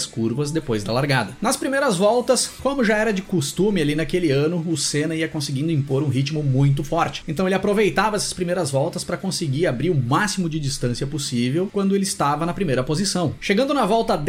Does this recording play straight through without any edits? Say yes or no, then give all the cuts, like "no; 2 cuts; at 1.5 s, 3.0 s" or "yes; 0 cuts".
no; 1 cut; at 7.2 s